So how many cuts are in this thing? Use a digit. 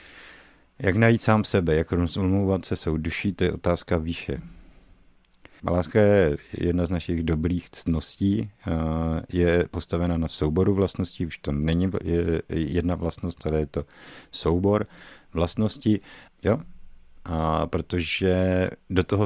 2